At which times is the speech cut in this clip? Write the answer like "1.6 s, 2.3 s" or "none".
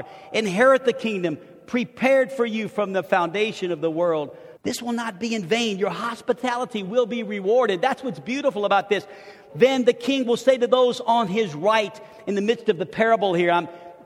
4.6 s, 9.5 s